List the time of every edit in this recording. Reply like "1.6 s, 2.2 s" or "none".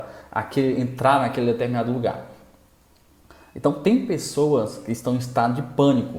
none